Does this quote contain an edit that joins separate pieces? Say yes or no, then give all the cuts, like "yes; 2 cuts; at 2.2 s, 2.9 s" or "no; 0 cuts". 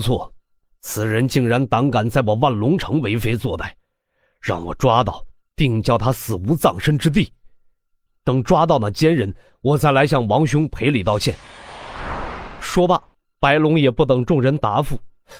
yes; 1 cut; at 8.1 s